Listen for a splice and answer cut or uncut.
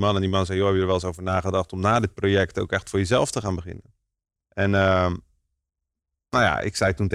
cut